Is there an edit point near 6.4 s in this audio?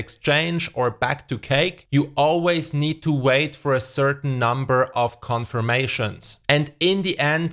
yes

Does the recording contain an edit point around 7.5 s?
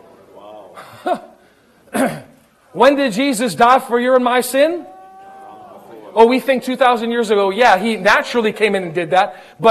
no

